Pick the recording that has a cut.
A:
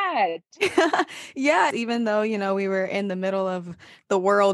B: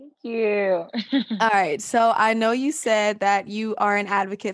A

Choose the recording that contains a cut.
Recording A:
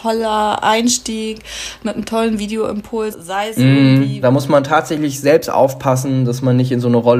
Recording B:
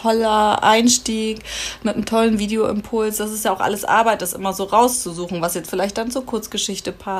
A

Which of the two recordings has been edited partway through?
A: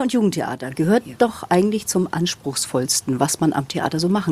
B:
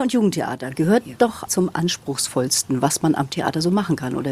B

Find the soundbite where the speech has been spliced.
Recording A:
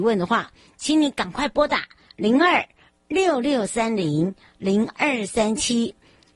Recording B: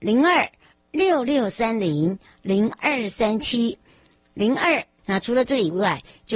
B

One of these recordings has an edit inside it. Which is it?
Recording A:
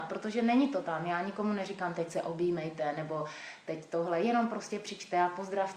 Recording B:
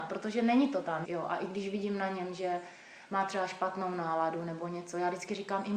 B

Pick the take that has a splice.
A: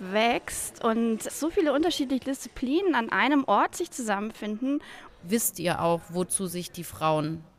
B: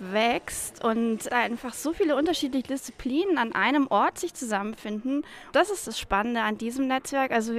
A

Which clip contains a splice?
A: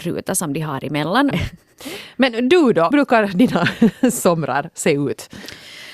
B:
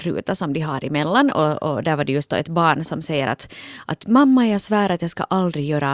A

